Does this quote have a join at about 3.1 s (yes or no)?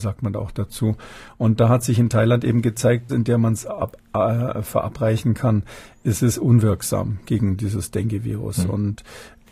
yes